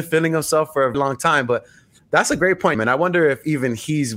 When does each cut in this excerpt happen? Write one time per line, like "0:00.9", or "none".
0:00.9
0:02.7

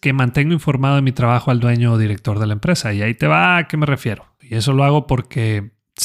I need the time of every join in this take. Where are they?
0:04.4

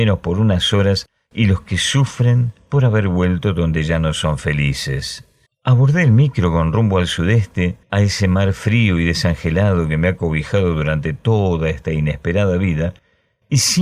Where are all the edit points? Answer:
0:05.5
0:07.8

